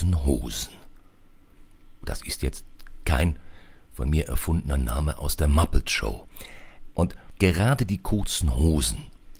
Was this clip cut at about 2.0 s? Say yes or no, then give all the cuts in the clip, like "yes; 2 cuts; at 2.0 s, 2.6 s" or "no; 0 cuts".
yes; 2 cuts; at 2.0 s, 6.9 s